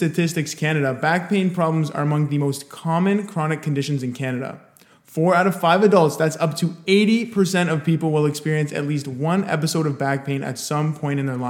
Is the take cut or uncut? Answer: uncut